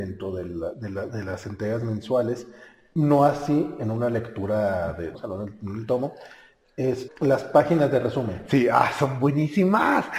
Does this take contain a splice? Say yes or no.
yes